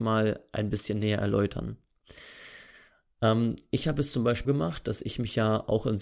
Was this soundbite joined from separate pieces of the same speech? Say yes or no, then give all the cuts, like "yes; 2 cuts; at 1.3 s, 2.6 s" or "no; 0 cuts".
yes; 1 cut; at 4.5 s